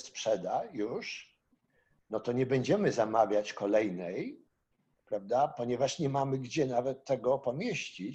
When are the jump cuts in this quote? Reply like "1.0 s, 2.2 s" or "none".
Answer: none